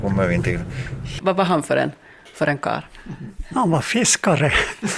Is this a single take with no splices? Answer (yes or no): no